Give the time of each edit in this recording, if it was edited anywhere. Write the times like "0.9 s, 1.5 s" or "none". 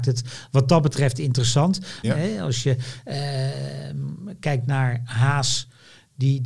2.0 s